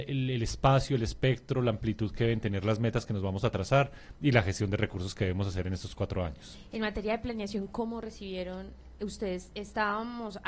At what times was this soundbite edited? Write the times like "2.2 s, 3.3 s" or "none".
9.5 s